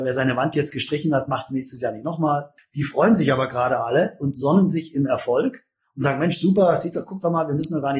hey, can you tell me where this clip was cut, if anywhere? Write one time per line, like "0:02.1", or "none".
0:02.6